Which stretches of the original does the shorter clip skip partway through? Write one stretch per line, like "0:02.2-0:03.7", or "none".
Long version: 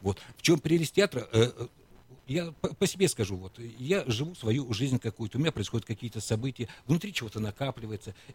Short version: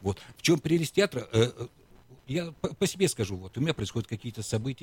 0:03.5-0:05.3